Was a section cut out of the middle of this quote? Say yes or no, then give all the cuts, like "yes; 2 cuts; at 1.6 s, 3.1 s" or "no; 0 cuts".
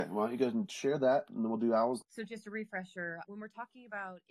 yes; 2 cuts; at 2.0 s, 3.2 s